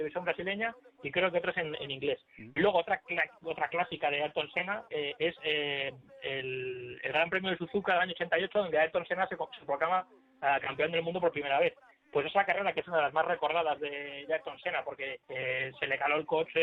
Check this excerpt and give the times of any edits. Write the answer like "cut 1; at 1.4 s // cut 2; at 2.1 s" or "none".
cut 1; at 15.2 s